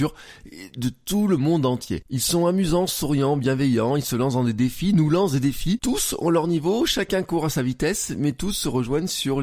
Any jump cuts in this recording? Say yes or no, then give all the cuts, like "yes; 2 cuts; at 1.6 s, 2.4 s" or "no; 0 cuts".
no; 0 cuts